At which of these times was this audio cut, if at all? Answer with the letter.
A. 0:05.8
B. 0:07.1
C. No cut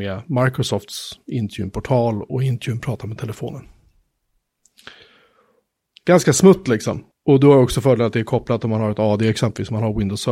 B